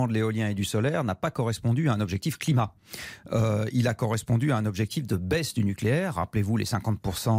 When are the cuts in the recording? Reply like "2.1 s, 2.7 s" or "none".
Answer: none